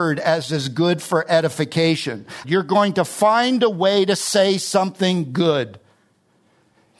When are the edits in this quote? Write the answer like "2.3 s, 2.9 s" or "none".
2.4 s

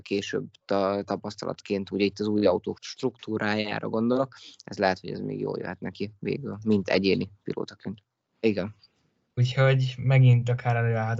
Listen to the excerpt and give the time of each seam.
2.7 s, 8.4 s

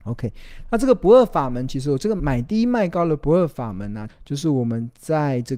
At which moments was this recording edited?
2.2 s, 4.1 s

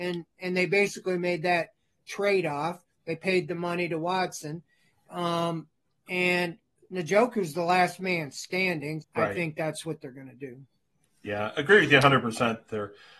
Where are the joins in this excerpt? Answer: 9.0 s

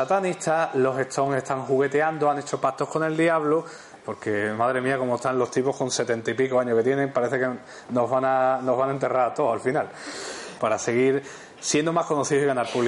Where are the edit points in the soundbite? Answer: 4.0 s, 10.6 s

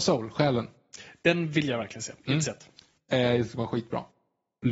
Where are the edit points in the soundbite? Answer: none

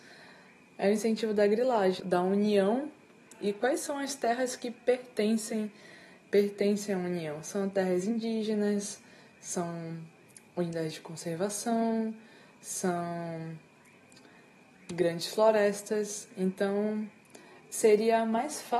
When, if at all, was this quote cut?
2.0 s

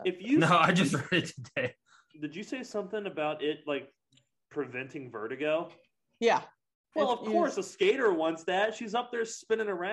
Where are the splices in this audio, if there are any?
none

